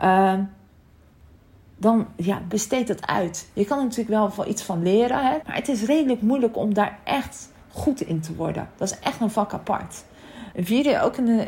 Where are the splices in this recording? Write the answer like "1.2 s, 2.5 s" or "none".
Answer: 5.4 s, 10.5 s